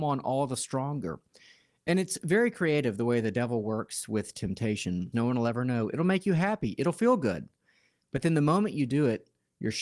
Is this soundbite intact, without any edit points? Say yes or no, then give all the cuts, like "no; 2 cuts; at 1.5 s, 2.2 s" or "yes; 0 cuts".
no; 1 cut; at 5.1 s